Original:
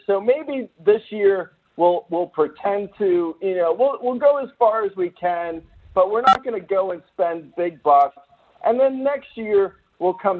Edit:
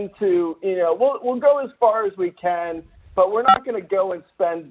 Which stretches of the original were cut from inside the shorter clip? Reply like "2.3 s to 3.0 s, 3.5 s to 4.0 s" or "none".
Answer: none